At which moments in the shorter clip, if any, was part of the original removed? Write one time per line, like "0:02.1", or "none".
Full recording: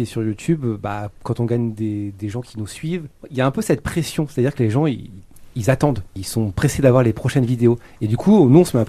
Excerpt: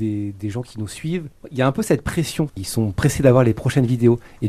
0:02.5